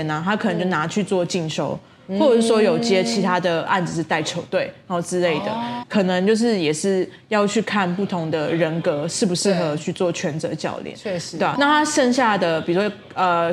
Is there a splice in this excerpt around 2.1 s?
no; 2 cuts; at 5.8 s, 11.6 s

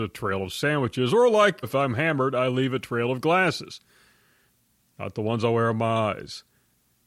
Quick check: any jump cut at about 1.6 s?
yes; 1 cut; at 1.6 s

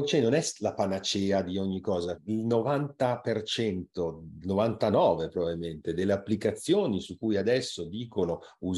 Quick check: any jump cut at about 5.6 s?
no; 1 cut; at 2.2 s

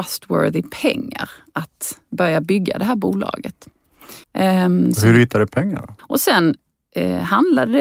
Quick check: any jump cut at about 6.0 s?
yes; 2 cuts; at 4.2 s, 6.0 s

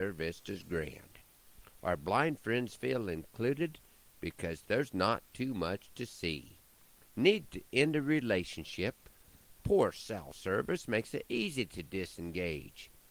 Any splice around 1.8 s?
no; 1 cut; at 7.1 s

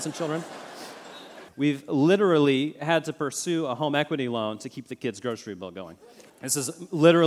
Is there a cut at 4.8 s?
no; 2 cuts; at 1.5 s, 6.3 s

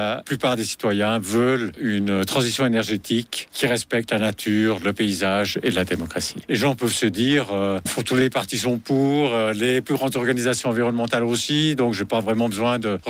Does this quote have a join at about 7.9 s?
yes; 1 cut; at 7.9 s

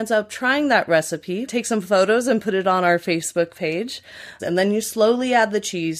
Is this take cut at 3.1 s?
no; 2 cuts; at 1.5 s, 4.4 s

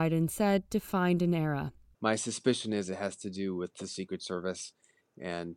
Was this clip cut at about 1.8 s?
yes; 1 cut; at 1.8 s

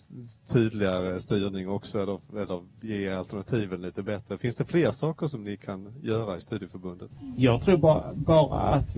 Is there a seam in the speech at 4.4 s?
no; 0 cuts

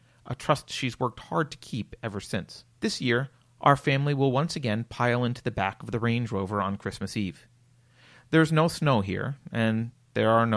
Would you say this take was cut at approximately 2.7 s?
yes; 1 cut; at 2.7 s

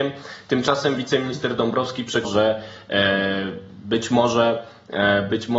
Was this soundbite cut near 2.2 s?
yes; 1 cut; at 2.2 s

